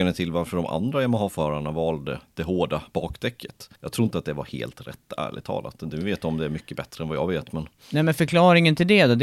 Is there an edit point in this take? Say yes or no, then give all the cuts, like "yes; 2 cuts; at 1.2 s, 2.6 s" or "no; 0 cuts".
yes; 1 cut; at 3.8 s